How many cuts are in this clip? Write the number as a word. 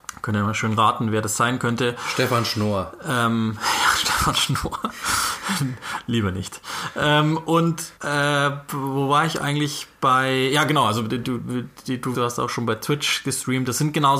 two